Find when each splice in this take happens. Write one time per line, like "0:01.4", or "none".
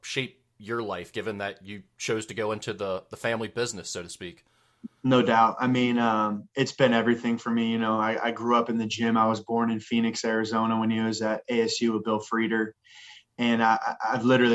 none